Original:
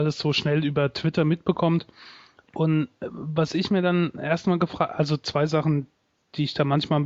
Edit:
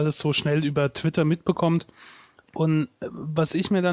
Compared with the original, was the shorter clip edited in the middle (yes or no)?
no